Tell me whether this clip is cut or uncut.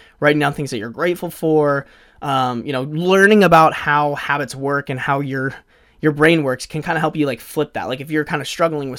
uncut